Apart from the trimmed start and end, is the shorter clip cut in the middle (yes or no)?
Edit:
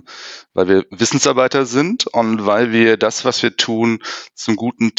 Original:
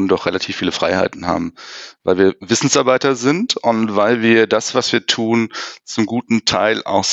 no